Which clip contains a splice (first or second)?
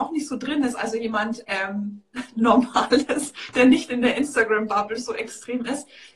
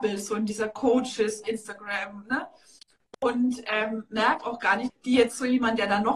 second